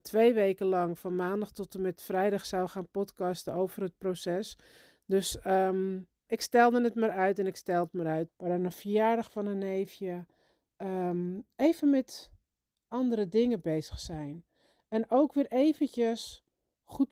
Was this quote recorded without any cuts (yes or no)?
no